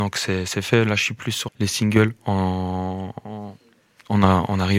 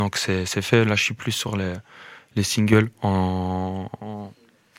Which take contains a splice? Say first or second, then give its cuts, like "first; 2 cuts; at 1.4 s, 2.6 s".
first; 1 cut; at 1.5 s